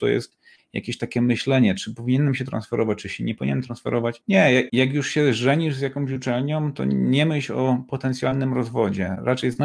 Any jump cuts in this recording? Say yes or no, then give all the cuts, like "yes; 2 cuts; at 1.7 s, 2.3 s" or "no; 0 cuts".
no; 0 cuts